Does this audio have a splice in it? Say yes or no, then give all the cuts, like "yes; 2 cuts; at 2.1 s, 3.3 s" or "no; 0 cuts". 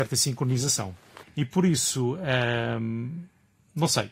yes; 1 cut; at 1.2 s